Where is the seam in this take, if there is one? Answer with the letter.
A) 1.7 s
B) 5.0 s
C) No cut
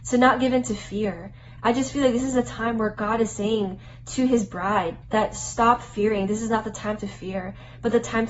B